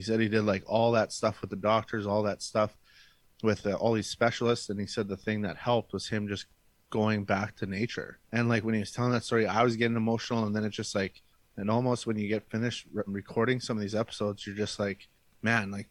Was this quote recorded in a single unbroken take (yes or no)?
no